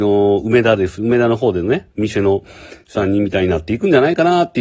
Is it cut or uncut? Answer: uncut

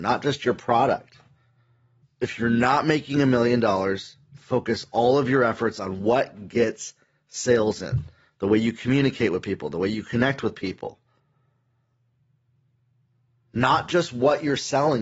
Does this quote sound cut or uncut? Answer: cut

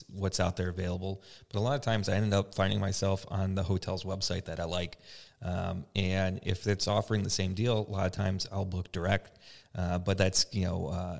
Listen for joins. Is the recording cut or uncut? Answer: uncut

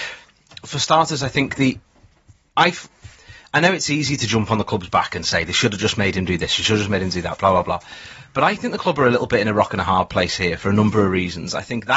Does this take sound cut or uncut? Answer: uncut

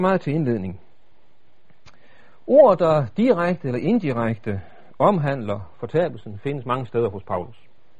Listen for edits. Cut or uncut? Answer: uncut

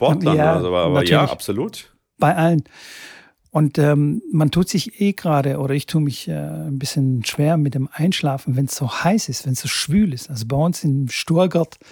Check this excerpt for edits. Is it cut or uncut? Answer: uncut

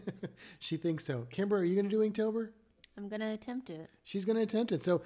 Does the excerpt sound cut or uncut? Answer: uncut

